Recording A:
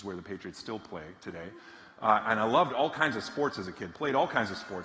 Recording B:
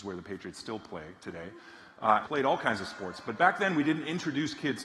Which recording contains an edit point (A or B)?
B